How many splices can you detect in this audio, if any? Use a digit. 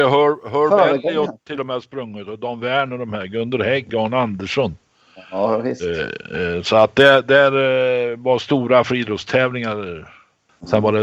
1